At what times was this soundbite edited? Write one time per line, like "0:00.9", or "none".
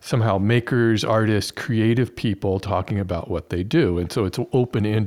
none